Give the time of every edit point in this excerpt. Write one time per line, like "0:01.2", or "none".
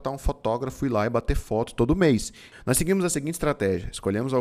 0:02.5